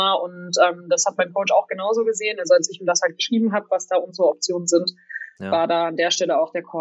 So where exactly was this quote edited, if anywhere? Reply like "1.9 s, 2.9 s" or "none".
none

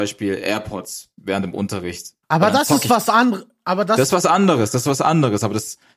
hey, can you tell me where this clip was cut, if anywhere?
2.2 s

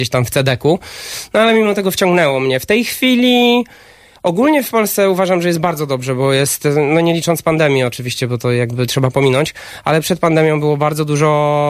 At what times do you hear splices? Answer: none

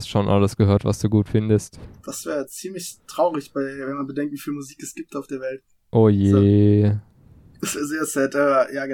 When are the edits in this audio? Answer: none

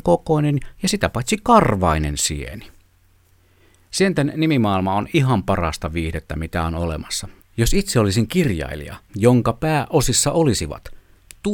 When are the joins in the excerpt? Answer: 7.4 s, 9.1 s

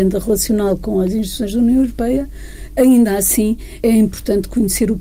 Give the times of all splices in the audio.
3.8 s

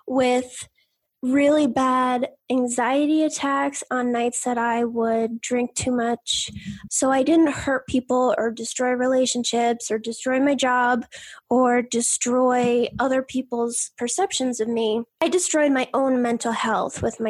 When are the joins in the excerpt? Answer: 6.9 s

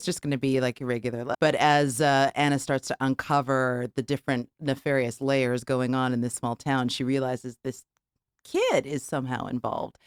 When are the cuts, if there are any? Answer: 1.3 s

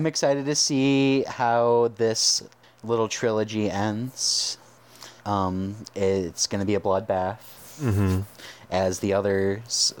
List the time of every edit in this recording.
5.2 s

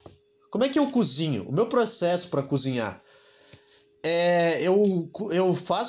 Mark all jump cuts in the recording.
none

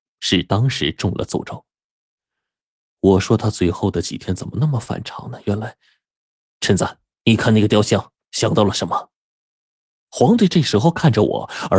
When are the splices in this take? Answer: none

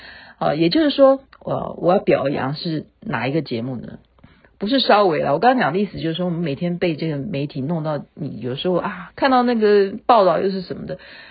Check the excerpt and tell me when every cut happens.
1.3 s, 9.1 s

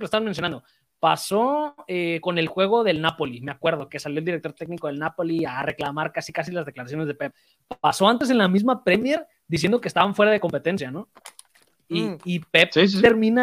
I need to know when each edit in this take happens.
none

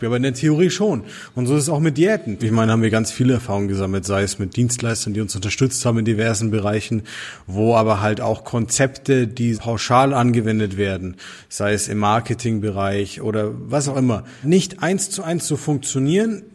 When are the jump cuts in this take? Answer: 2.4 s, 9.5 s, 14.4 s

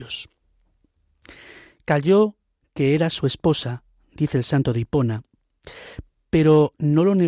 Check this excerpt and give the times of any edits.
none

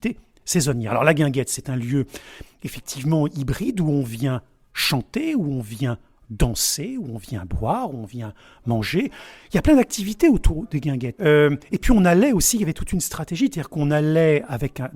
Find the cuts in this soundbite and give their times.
11.2 s

